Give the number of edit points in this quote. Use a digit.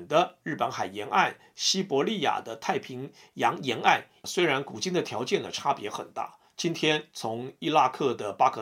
1